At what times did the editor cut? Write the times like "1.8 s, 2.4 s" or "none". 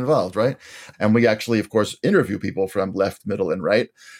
0.9 s